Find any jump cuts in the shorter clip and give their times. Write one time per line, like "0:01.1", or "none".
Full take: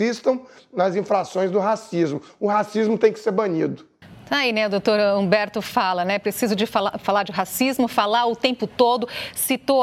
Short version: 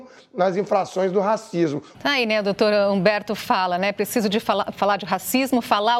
0:01.9